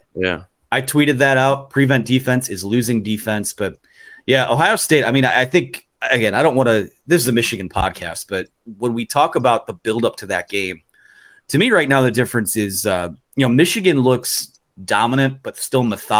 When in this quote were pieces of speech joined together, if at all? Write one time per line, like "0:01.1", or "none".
none